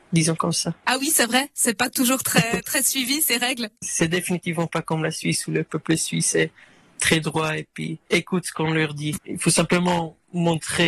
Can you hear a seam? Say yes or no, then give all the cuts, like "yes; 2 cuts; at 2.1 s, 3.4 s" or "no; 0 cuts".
yes; 1 cut; at 9.2 s